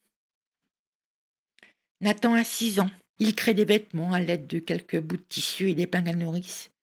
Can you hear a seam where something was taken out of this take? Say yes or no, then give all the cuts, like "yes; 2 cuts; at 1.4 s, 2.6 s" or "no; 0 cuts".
yes; 1 cut; at 3.2 s